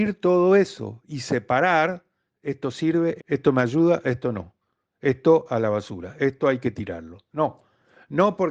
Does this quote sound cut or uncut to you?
cut